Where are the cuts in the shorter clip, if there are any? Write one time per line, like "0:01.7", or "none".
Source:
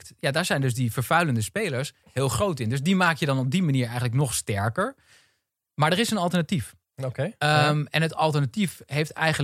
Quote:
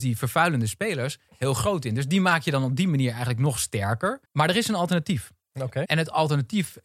0:04.2
0:05.8

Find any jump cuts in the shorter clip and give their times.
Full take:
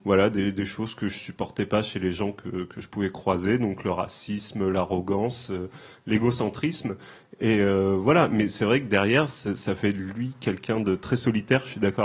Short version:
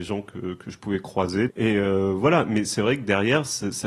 0:01.5

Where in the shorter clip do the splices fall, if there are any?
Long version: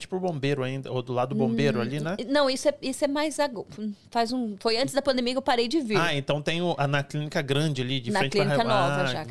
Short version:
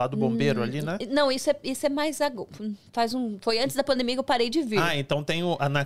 none

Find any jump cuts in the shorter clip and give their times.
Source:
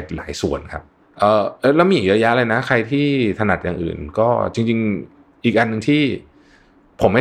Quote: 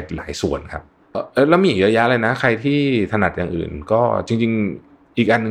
0:01.1

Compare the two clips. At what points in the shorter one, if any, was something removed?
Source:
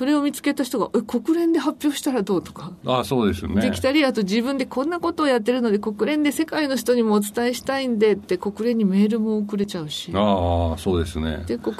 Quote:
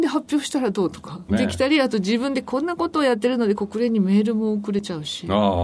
0:01.3
0:03.5

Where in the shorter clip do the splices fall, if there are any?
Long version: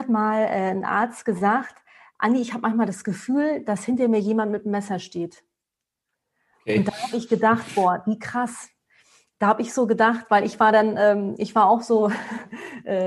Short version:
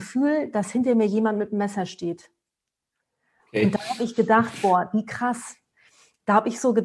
none

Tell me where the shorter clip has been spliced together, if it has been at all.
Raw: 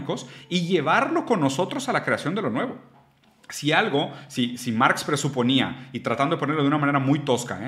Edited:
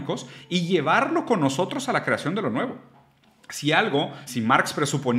0:04.3

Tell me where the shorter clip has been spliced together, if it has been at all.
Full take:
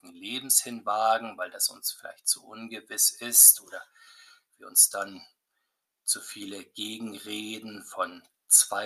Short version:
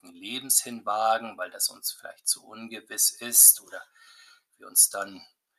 none

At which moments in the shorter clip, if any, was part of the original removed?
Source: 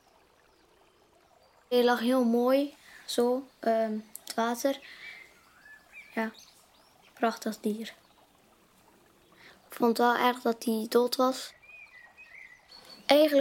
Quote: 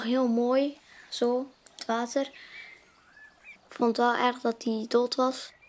0:01.7
0:03.6

